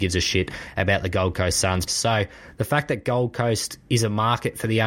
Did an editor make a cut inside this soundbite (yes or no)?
yes